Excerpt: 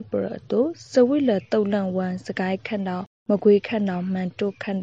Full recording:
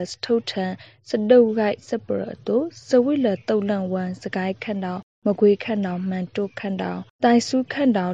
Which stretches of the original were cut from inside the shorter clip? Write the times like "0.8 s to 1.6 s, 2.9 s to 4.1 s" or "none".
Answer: none